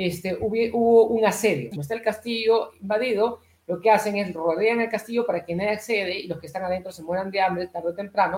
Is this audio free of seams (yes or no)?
no